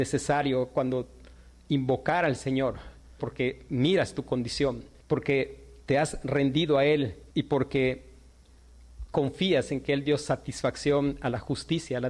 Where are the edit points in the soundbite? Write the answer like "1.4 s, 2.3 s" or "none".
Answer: 3.2 s, 5.0 s, 7.3 s